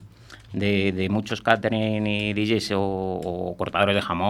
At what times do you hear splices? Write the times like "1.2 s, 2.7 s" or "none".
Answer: none